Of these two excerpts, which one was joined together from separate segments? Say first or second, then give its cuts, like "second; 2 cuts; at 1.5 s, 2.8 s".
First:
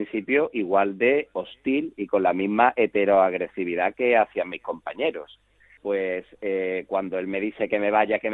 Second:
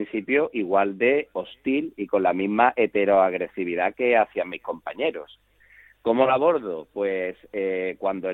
first; 1 cut; at 5.8 s